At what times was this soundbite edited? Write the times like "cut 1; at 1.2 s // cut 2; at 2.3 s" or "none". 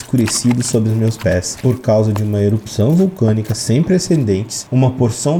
cut 1; at 1.6 s